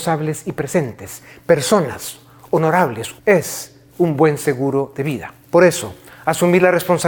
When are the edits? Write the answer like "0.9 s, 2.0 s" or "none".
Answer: 3.2 s, 5.4 s